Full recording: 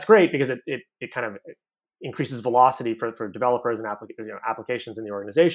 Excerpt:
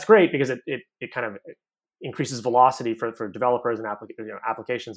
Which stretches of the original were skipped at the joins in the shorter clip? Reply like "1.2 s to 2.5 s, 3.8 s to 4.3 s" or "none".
none